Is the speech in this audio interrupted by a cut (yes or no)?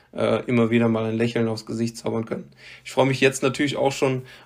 no